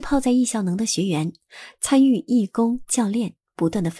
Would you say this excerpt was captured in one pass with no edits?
no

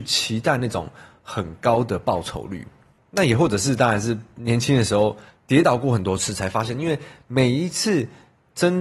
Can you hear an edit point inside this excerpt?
no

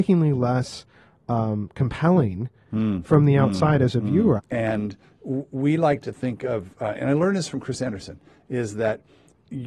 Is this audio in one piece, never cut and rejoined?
no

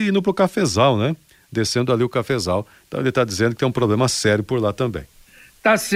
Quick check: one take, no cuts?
yes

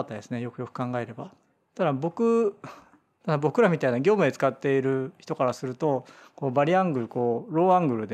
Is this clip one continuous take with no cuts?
yes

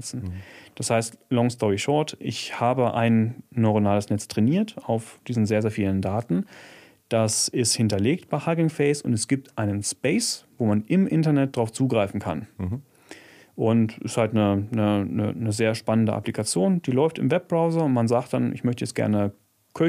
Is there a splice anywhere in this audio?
no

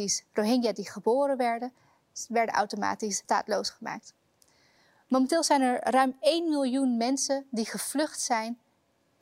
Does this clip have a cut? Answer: no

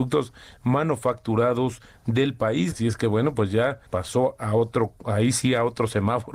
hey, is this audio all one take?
no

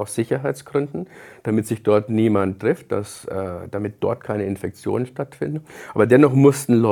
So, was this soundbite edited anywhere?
no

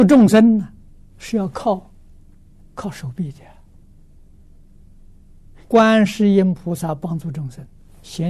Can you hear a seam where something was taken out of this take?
yes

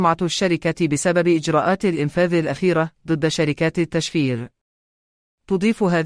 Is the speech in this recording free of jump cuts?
yes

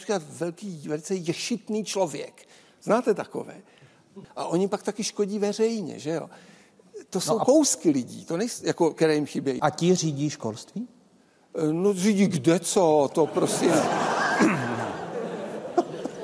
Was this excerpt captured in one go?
no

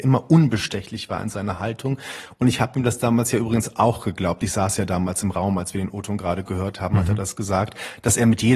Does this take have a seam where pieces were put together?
no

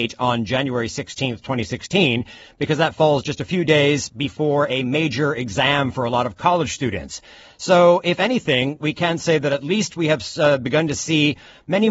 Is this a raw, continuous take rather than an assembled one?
yes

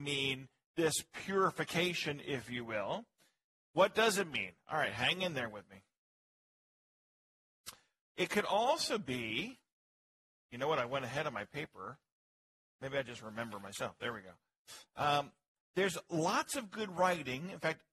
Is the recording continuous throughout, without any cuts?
yes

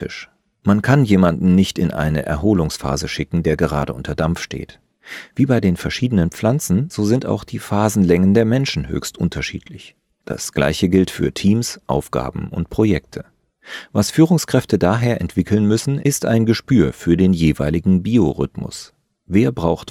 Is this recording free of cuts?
yes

